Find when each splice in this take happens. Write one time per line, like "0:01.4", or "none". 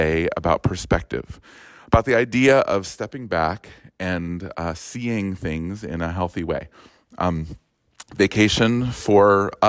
none